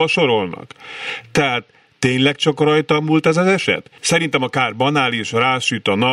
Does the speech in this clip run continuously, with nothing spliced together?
no; 1 cut; at 4.0 s

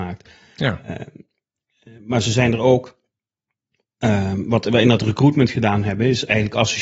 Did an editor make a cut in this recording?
no; 0 cuts

